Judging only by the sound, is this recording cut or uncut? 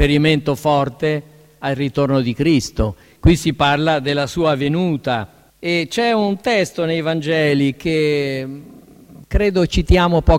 cut